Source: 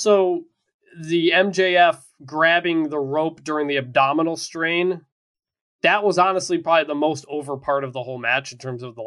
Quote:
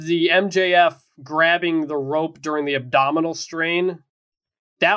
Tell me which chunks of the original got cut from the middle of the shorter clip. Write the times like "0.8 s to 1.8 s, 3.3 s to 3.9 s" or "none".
none